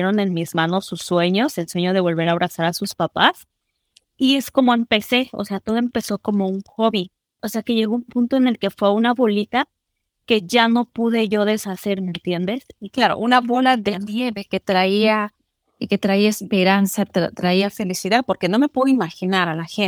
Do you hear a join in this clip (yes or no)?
yes